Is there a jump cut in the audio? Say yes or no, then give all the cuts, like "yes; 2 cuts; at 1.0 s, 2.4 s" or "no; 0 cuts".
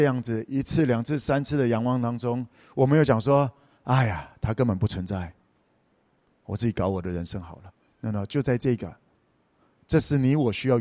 no; 0 cuts